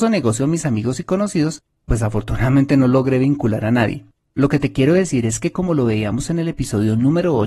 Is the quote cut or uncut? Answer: cut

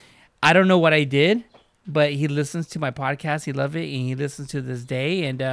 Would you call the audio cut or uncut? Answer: uncut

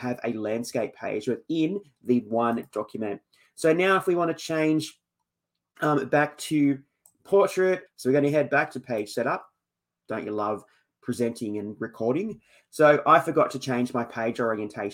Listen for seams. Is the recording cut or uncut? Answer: cut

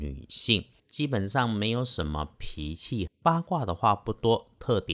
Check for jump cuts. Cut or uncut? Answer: cut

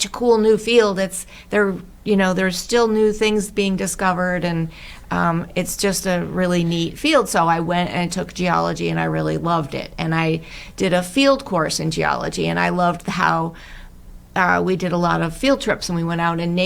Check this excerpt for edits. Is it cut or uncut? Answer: uncut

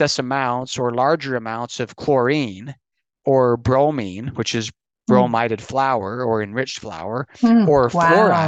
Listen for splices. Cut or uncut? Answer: uncut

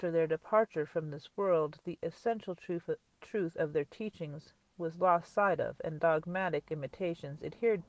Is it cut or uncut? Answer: uncut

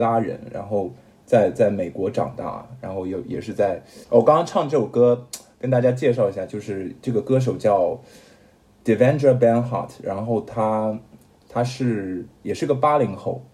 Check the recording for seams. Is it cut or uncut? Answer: cut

